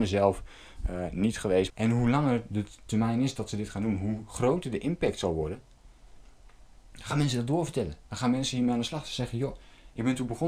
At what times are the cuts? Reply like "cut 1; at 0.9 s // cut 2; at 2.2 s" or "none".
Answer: cut 1; at 1.7 s